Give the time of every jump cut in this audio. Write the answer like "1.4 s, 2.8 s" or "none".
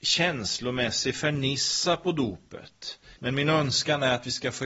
3.2 s